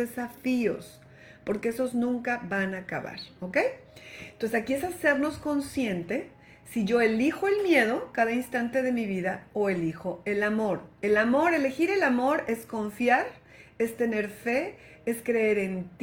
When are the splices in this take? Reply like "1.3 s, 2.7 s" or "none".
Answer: none